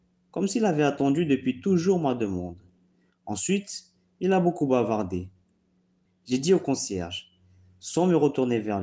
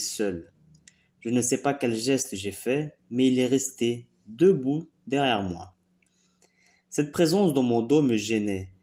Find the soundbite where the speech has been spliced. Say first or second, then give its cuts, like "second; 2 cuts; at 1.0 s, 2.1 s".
first; 1 cut; at 6.1 s